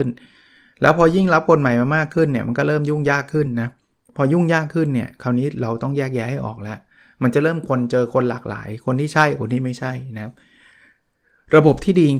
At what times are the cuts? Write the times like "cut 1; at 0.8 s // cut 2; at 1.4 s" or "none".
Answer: none